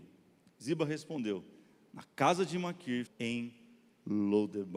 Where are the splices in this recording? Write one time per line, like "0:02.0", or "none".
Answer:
0:03.1